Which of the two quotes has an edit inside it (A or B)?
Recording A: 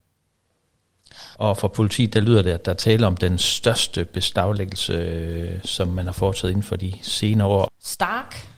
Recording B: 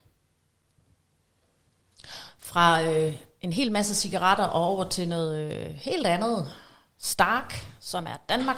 A